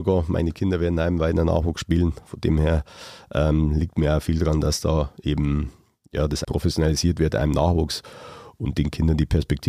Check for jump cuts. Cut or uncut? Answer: cut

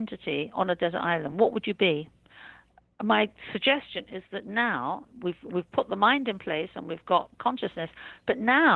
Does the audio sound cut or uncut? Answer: uncut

